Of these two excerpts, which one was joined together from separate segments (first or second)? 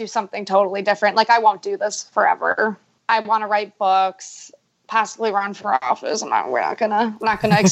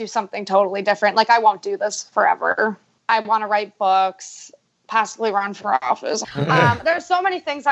second